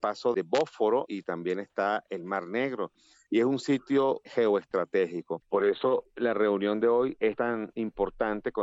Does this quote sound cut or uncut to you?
cut